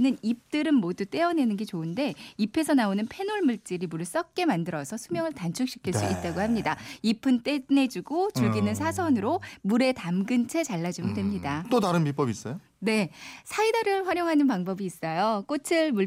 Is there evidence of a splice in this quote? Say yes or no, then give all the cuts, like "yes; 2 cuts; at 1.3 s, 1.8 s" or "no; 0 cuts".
no; 0 cuts